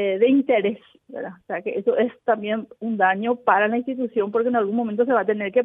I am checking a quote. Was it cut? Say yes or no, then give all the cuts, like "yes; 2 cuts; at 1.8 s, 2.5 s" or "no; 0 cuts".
no; 0 cuts